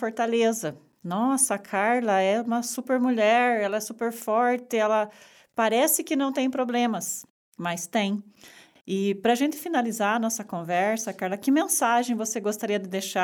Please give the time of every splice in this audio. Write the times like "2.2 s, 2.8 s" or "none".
8.8 s